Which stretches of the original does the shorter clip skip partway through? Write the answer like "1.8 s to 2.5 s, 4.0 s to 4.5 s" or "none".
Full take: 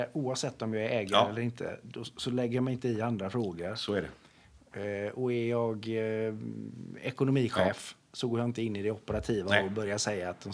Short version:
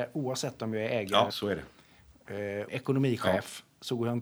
1.3 s to 3.8 s, 5.1 s to 7.0 s